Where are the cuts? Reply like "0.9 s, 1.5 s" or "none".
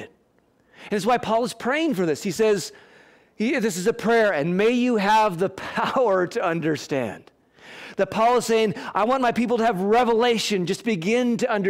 none